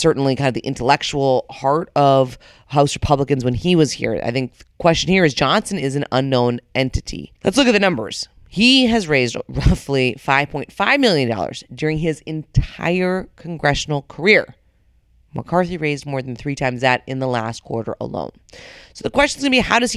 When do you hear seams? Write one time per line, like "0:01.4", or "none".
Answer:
0:07.4